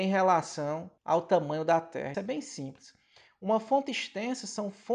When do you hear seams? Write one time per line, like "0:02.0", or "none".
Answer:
0:01.0
0:02.1